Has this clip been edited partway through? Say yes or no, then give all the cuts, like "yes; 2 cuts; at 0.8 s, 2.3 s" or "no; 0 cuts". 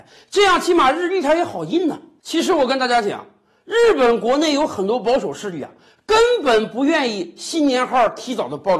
no; 0 cuts